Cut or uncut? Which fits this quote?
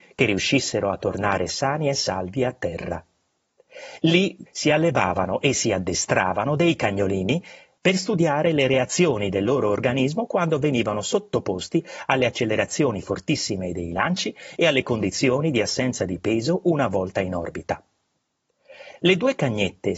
cut